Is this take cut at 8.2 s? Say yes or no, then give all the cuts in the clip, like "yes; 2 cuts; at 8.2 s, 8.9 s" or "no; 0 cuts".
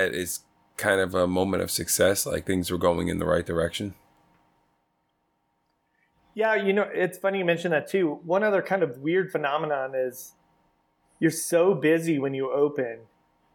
no; 0 cuts